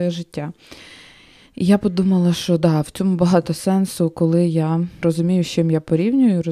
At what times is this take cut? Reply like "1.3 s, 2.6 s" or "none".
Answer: 5.0 s